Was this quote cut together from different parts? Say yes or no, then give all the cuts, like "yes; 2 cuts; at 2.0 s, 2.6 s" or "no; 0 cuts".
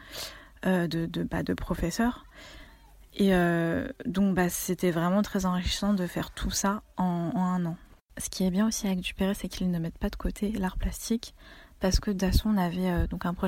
no; 0 cuts